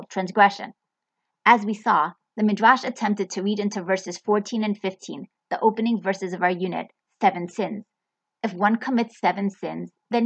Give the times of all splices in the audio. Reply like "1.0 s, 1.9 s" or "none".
8.3 s